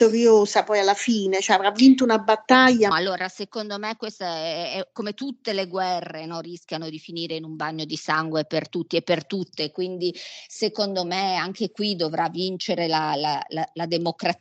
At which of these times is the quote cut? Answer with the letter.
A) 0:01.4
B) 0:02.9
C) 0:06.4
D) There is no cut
B